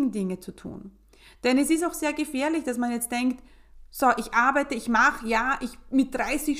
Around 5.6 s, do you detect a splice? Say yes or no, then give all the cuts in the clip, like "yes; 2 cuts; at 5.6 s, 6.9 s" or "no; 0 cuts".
no; 0 cuts